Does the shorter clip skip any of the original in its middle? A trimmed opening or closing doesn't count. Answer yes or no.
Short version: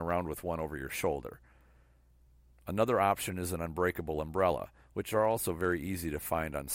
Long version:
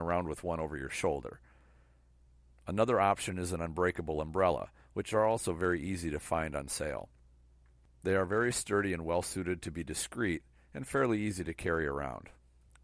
no